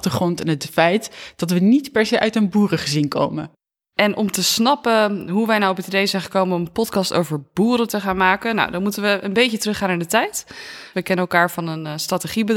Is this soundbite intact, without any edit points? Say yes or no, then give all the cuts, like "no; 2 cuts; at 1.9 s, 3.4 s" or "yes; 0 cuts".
no; 2 cuts; at 3.9 s, 10.9 s